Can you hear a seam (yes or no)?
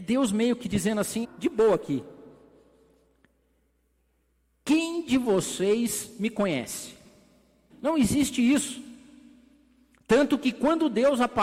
yes